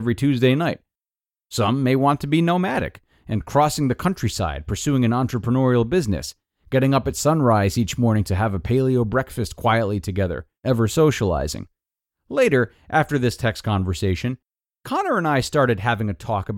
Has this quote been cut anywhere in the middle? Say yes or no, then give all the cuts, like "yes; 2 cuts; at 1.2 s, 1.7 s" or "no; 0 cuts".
yes; 2 cuts; at 10.6 s, 12.1 s